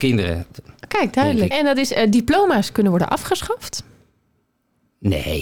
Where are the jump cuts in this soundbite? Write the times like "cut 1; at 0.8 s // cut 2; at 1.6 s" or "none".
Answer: cut 1; at 1.5 s